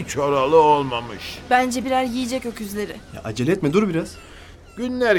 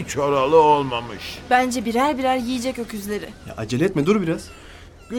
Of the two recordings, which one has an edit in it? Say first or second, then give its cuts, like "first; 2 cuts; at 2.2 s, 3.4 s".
first; 1 cut; at 1.8 s